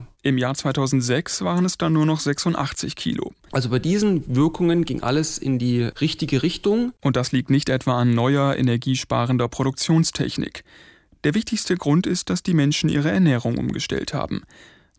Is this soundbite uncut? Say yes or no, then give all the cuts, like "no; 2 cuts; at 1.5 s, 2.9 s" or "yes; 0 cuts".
no; 1 cut; at 3.5 s